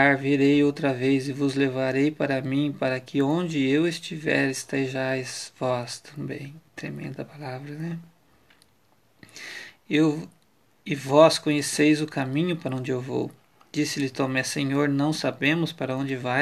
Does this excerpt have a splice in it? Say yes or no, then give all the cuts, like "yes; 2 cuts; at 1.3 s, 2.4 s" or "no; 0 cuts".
no; 0 cuts